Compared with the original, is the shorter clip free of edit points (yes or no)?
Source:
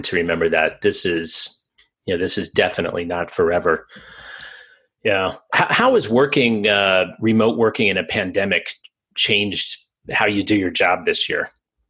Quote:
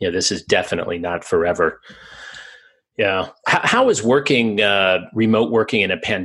yes